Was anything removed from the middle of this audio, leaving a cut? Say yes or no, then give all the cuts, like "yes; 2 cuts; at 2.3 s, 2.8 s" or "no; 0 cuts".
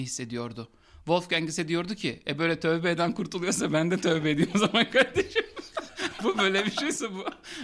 yes; 1 cut; at 6.2 s